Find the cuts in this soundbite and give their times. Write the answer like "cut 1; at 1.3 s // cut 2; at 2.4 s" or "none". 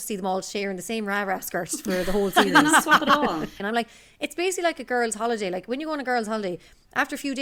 cut 1; at 3.6 s